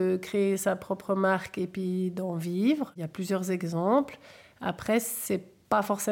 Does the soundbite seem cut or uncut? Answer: uncut